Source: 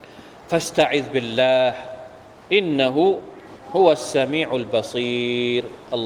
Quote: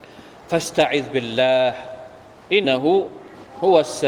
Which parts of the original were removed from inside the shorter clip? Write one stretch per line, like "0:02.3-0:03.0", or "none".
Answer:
0:02.6-0:02.8